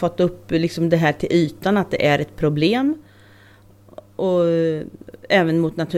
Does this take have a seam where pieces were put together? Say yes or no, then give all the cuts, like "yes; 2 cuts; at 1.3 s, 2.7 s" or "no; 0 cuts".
no; 0 cuts